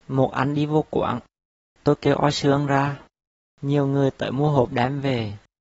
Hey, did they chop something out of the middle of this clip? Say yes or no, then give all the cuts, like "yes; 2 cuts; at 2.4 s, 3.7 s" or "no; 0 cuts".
yes; 1 cut; at 3.4 s